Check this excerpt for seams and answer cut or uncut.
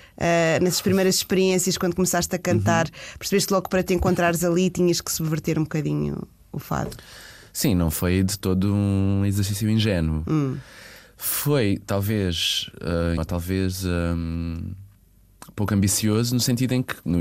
cut